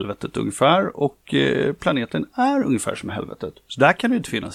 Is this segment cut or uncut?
uncut